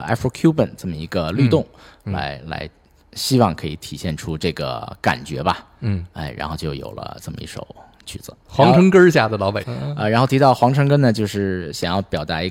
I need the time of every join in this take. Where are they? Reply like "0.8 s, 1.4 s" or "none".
8.5 s, 9.6 s